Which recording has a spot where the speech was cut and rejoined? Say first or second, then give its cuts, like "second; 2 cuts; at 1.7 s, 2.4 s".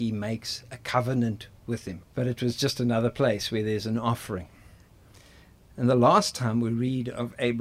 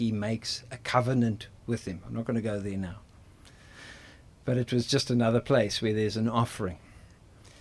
first; 1 cut; at 2.0 s